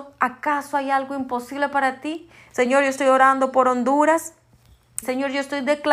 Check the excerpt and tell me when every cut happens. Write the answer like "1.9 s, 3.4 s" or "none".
2.5 s, 5.0 s